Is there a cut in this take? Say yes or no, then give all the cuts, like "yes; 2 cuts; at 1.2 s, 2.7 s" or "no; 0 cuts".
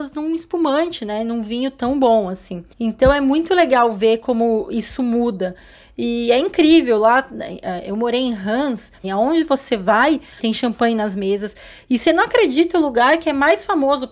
yes; 3 cuts; at 2.7 s, 9.0 s, 10.4 s